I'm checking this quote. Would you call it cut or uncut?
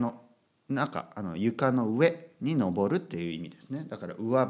uncut